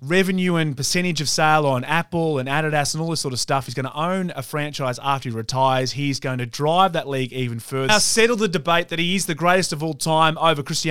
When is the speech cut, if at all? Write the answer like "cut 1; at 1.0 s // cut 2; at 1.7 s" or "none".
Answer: cut 1; at 7.9 s